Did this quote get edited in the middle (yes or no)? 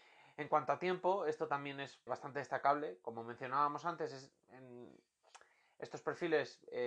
yes